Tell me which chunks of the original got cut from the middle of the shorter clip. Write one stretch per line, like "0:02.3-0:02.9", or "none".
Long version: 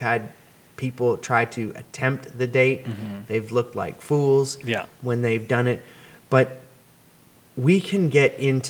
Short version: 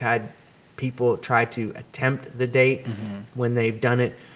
0:03.3-0:04.9